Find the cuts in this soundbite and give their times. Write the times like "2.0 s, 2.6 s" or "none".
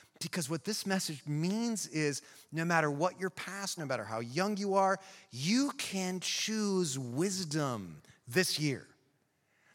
3.8 s